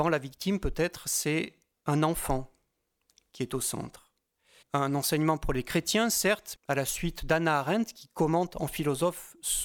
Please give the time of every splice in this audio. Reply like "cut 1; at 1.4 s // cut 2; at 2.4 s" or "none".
cut 1; at 4.6 s // cut 2; at 6.5 s